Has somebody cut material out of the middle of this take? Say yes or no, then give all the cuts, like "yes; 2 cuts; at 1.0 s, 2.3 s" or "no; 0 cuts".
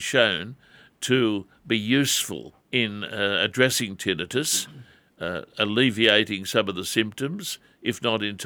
yes; 1 cut; at 2.6 s